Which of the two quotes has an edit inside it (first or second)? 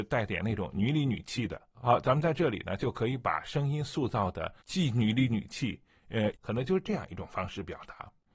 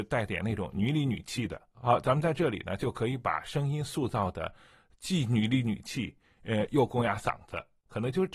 first